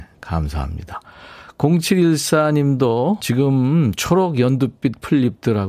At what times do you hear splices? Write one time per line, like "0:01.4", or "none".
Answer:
0:03.2